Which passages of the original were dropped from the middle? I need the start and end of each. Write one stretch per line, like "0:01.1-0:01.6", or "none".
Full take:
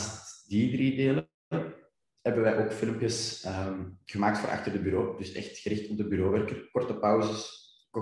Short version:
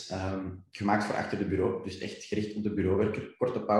none